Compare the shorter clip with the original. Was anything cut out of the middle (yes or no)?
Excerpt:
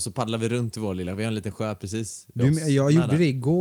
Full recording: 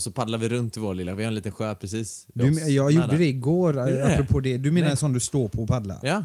no